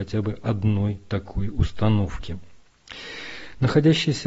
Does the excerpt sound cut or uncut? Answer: uncut